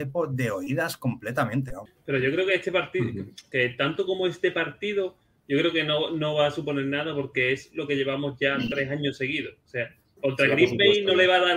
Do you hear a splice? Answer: yes; 1 cut; at 10.2 s

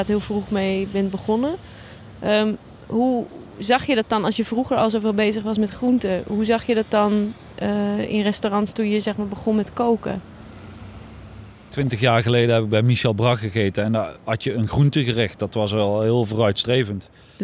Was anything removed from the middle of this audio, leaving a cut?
no; 0 cuts

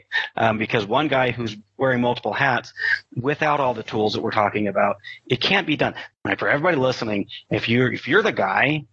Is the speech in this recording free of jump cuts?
no; 1 cut; at 6.1 s

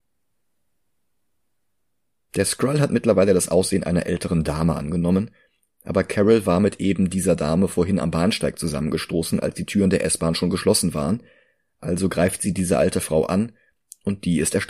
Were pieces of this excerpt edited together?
no; 0 cuts

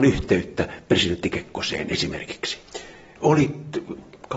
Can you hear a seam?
yes; 1 cut; at 3.2 s

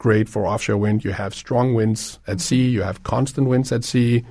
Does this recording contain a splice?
no; 0 cuts

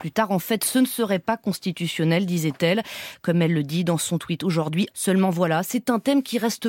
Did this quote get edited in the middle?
yes; 1 cut; at 4.9 s

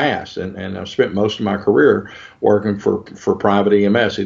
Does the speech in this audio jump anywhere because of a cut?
no; 0 cuts

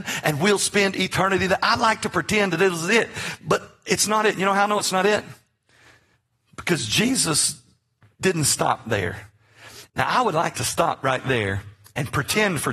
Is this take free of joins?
no; 1 cut; at 9.9 s

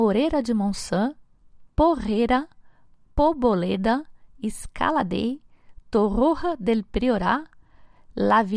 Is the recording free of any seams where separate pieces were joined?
yes; 0 cuts

